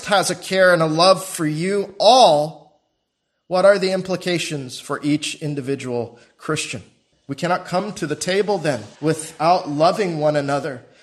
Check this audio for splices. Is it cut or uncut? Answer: cut